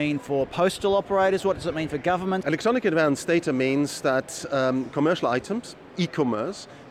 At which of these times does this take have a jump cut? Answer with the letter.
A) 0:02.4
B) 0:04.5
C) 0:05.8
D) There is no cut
A